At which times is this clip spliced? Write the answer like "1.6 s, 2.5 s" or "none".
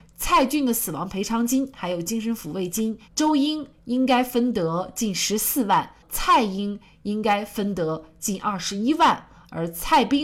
3.0 s